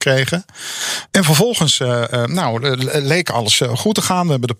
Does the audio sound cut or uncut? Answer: cut